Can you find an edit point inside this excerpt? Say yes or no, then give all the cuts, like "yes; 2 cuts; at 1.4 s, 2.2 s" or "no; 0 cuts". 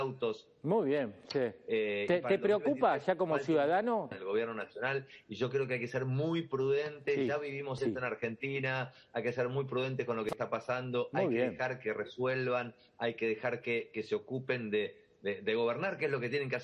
yes; 1 cut; at 4.1 s